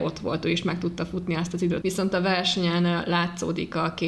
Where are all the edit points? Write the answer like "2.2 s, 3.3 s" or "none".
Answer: 1.8 s